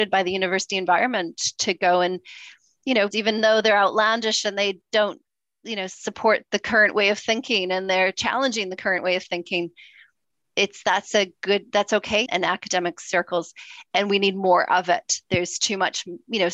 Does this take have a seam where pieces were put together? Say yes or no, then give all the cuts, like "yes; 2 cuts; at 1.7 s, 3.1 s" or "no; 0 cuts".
yes; 2 cuts; at 3.1 s, 12.3 s